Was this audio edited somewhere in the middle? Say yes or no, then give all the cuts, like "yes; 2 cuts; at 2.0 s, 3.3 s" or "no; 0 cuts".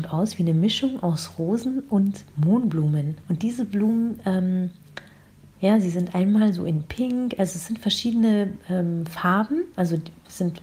yes; 1 cut; at 3.2 s